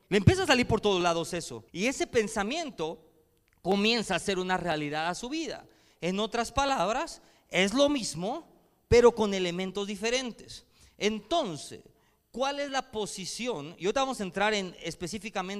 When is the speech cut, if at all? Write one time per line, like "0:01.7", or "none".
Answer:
0:01.7
0:05.9